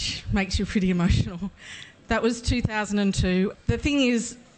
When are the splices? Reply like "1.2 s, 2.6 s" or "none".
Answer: 3.5 s